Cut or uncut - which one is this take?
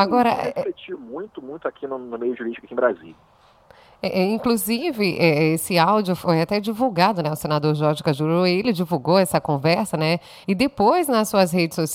cut